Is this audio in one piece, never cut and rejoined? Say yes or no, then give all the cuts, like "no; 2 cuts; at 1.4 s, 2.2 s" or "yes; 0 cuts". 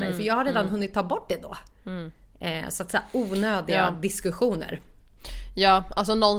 yes; 0 cuts